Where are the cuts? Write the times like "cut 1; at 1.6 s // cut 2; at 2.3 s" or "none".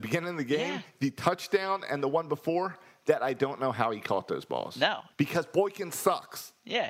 none